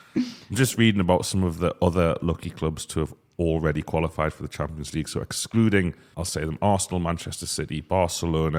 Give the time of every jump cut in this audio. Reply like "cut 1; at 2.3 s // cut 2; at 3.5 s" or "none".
cut 1; at 6.1 s